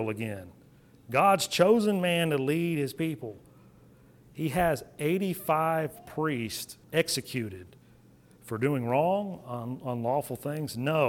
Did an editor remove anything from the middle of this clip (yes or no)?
yes